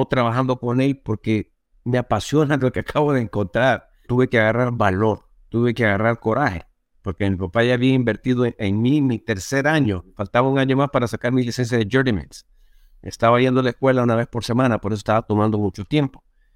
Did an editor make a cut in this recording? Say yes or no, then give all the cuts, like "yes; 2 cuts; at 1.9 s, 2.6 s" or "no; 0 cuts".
yes; 1 cut; at 4.0 s